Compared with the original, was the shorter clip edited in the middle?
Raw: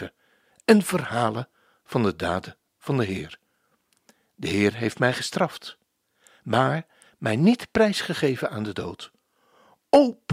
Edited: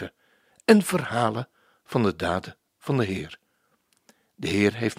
no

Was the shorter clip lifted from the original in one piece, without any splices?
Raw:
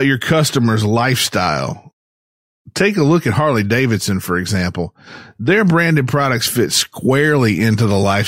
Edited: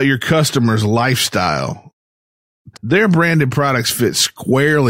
no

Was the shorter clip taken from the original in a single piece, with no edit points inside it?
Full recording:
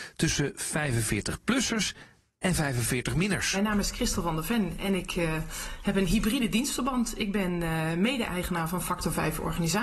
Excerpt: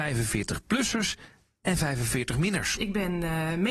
no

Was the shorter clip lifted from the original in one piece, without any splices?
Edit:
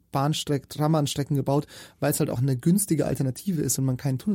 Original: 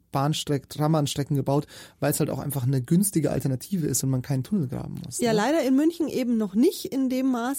no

